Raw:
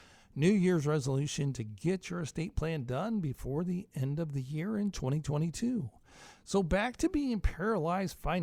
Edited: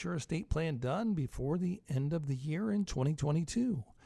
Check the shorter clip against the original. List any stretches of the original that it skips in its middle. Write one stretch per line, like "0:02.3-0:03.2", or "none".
none